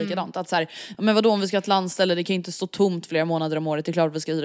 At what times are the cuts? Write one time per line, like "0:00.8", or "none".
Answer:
none